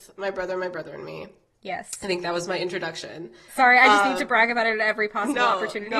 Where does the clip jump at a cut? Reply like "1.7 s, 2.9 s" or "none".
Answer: 3.5 s